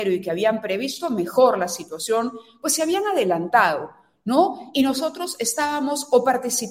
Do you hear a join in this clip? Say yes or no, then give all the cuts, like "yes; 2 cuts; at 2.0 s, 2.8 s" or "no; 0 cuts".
no; 0 cuts